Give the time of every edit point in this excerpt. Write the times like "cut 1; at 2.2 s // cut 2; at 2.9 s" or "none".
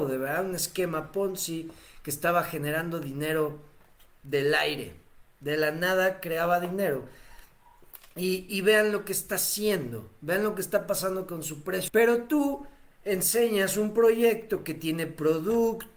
cut 1; at 8.5 s // cut 2; at 11.9 s

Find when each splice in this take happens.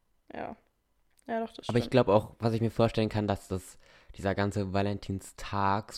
none

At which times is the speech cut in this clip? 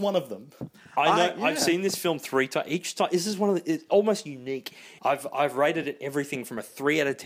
cut 1; at 5.0 s

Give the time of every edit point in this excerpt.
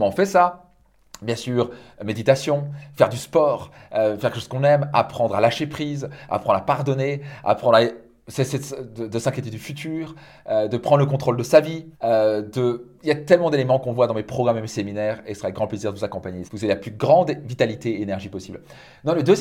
cut 1; at 11.9 s // cut 2; at 16.5 s

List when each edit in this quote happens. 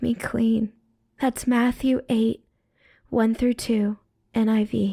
none

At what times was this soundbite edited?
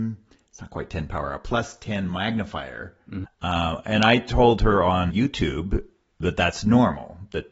cut 1; at 3.2 s // cut 2; at 5.1 s

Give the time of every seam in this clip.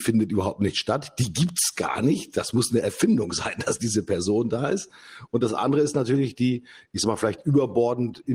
none

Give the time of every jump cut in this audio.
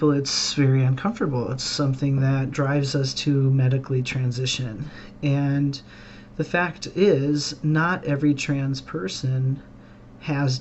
none

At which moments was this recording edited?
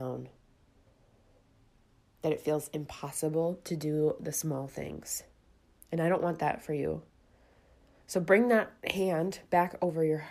none

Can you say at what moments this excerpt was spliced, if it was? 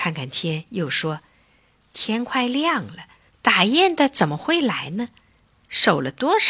cut 1; at 3.3 s

